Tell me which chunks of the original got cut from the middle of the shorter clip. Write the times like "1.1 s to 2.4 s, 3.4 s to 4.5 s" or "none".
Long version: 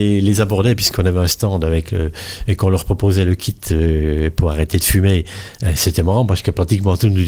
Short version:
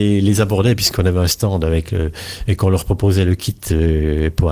none